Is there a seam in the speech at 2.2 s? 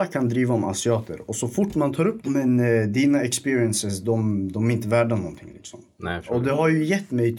yes; 1 cut; at 2.2 s

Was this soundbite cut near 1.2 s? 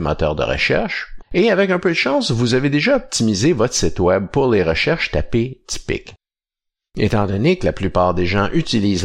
yes; 1 cut; at 1.2 s

